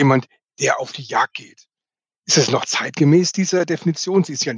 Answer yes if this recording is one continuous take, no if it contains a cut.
yes